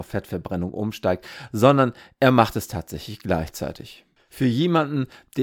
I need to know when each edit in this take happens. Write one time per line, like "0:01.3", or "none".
none